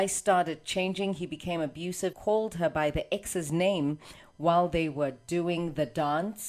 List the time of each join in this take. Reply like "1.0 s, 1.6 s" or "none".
2.1 s